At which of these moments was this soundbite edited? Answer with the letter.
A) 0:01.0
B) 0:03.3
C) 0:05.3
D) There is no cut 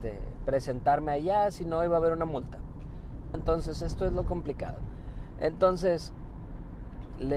B